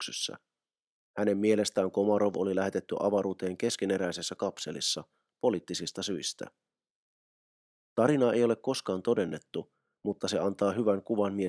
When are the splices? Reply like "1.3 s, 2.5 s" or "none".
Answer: 1.1 s, 7.8 s